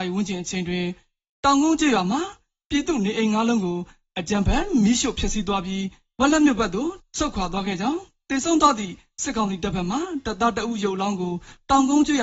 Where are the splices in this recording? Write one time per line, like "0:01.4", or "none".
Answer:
none